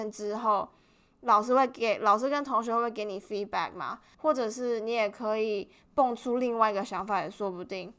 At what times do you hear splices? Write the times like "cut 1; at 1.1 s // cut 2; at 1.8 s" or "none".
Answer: cut 1; at 4.1 s